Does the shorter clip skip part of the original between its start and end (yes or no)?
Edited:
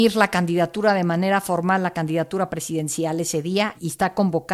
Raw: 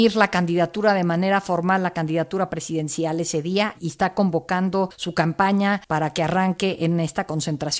no